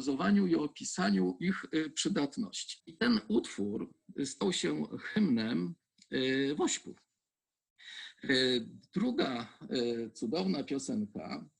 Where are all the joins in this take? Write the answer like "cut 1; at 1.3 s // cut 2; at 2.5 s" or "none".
cut 1; at 2.8 s

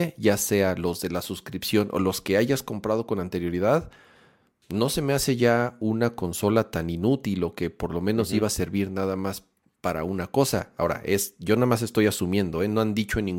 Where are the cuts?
none

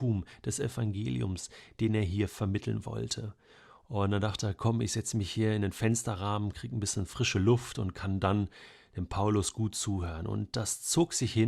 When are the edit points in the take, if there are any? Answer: cut 1; at 3.8 s

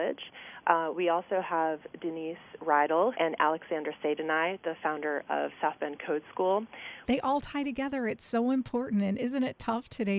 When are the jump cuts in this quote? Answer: cut 1; at 3.1 s // cut 2; at 7.0 s

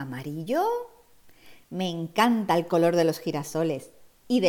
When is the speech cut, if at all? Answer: none

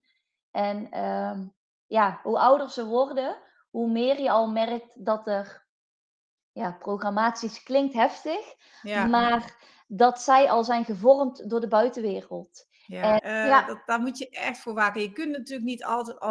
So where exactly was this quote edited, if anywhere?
cut 1; at 13.2 s

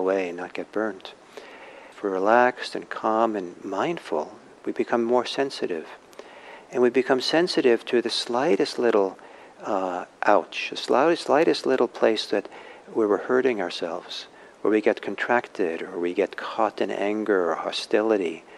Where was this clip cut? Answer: cut 1; at 1.9 s

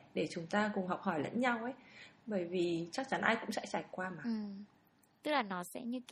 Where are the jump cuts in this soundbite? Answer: cut 1; at 5.2 s

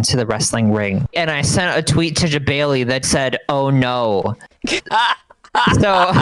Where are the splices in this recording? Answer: cut 1; at 1.1 s // cut 2; at 3.0 s // cut 3; at 4.8 s

